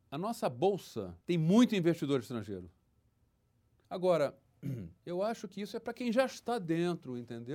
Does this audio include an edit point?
yes; 2 cuts; at 1.2 s, 3.8 s

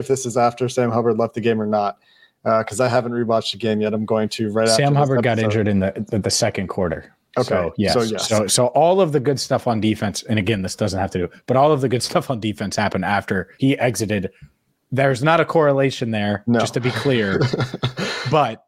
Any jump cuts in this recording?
yes; 1 cut; at 13.5 s

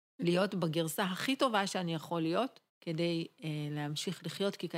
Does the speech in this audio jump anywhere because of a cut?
yes; 1 cut; at 2.7 s

